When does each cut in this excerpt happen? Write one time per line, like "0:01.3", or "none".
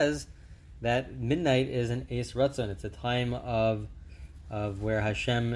none